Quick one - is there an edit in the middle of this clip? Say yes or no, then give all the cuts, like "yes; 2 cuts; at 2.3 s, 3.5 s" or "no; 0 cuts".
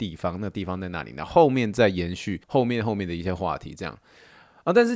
yes; 1 cut; at 2.4 s